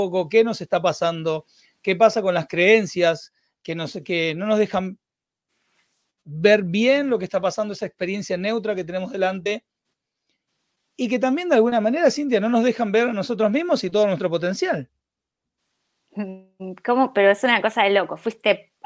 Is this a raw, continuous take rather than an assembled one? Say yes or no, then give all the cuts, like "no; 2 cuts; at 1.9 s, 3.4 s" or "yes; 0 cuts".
yes; 0 cuts